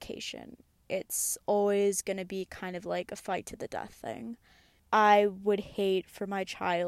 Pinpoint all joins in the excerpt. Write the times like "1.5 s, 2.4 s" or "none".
4.8 s